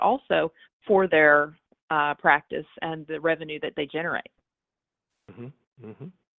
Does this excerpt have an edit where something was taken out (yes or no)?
no